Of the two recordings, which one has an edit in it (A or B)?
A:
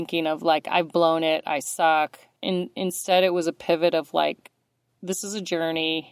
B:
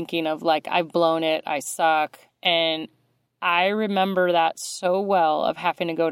B